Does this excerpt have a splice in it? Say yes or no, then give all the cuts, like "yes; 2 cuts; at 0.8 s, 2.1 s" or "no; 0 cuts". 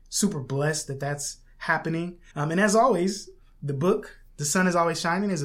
yes; 1 cut; at 2.3 s